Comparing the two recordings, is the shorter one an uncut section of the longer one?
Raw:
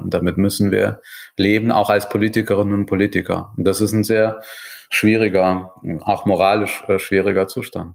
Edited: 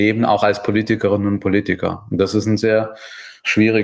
yes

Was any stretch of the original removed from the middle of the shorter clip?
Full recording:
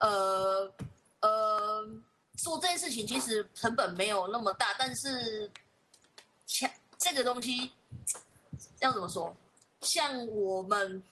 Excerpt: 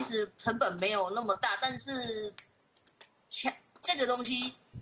no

